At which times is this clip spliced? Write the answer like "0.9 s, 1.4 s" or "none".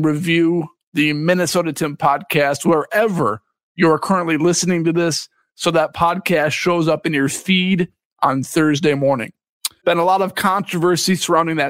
9.8 s